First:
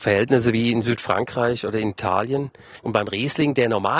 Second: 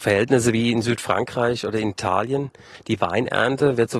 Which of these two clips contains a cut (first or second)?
first